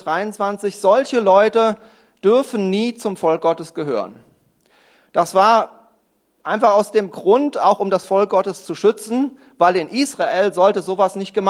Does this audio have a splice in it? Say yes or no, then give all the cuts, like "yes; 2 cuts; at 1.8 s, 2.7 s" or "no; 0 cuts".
no; 0 cuts